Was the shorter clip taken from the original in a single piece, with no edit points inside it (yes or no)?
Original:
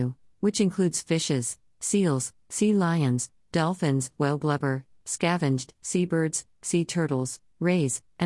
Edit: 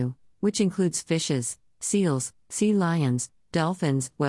yes